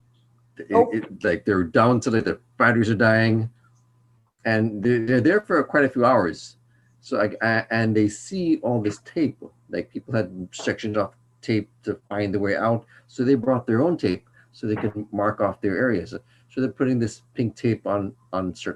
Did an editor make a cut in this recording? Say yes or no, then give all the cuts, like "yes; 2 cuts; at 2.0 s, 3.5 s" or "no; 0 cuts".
no; 0 cuts